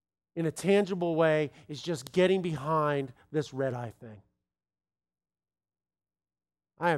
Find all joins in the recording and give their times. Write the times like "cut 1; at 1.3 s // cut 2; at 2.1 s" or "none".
none